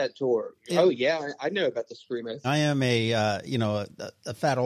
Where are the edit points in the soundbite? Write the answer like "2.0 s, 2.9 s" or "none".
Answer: 2.4 s